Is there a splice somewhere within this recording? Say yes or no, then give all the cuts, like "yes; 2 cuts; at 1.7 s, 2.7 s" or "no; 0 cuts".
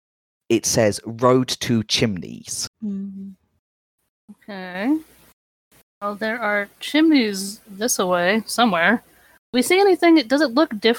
yes; 2 cuts; at 2.7 s, 7.6 s